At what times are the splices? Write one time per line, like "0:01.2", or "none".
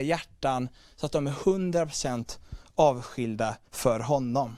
0:03.7

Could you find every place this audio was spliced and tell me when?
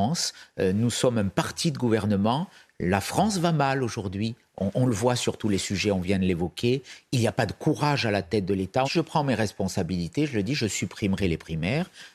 0:08.8

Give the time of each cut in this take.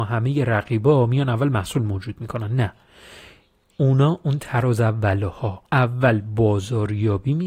0:05.7

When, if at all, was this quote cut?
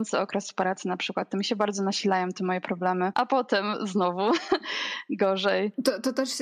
0:03.1

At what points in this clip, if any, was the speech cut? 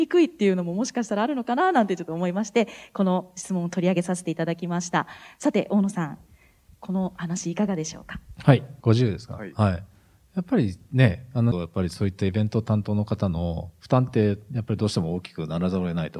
0:08.8
0:11.5

